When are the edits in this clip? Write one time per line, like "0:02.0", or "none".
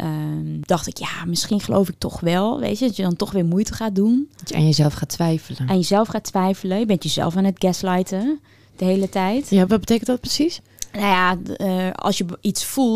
0:09.7